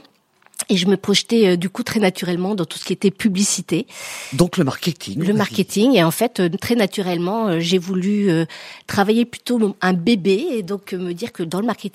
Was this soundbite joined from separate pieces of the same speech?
no; 0 cuts

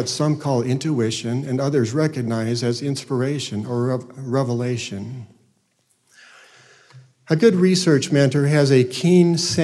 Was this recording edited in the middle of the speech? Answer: no; 0 cuts

